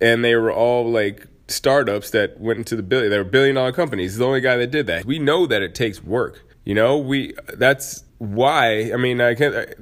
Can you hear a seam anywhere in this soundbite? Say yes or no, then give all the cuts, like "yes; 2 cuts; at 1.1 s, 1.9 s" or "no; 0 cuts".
yes; 3 cuts; at 5.0 s, 6.5 s, 8.1 s